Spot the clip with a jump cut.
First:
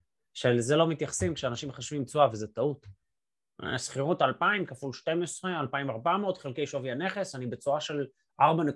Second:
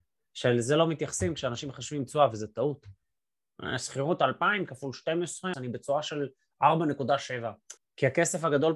second; 2 cuts; at 5.5 s, 7.8 s

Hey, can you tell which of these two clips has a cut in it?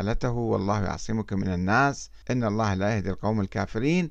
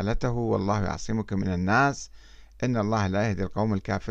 first; 1 cut; at 2.2 s

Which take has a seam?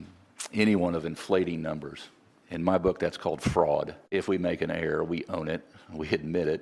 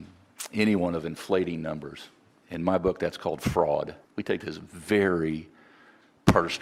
second; 1 cut; at 4.0 s

